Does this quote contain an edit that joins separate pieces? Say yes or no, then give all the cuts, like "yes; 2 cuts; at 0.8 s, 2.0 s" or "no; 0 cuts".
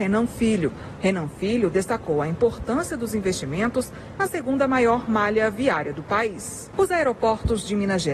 yes; 2 cuts; at 1.0 s, 6.7 s